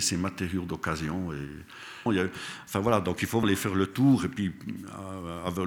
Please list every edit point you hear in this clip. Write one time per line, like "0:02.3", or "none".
0:02.1
0:03.4